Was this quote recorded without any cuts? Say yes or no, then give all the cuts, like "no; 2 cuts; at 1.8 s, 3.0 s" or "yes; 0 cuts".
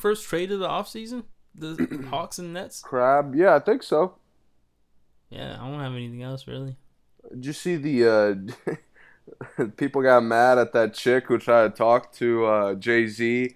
yes; 0 cuts